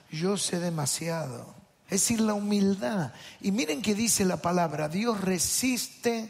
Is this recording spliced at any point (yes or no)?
yes